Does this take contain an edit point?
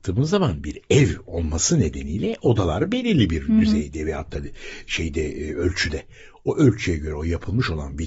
no; 0 cuts

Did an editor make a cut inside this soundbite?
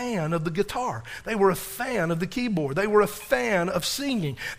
no; 0 cuts

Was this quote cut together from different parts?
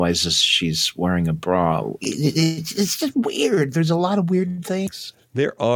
yes; 1 cut; at 2.0 s

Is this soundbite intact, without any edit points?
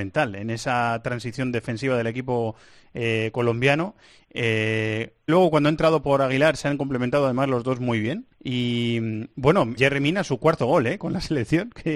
no; 3 cuts; at 5.3 s, 8.3 s, 9.8 s

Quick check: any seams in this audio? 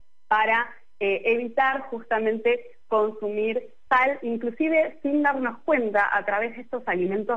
yes; 1 cut; at 3.9 s

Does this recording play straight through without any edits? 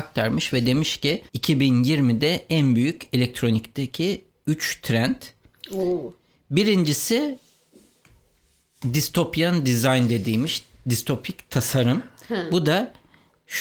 no; 1 cut; at 1.3 s

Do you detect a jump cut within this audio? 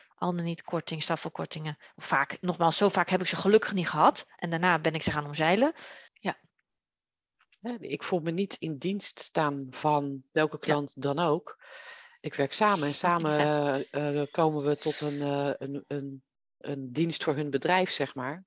yes; 2 cuts; at 6.1 s, 16.6 s

